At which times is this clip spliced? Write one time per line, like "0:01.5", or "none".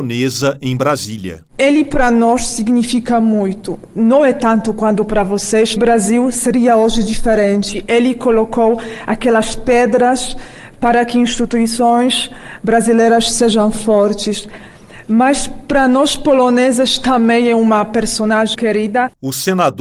0:05.8
0:18.5